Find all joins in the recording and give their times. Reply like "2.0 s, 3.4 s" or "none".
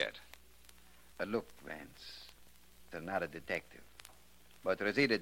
1.1 s, 2.9 s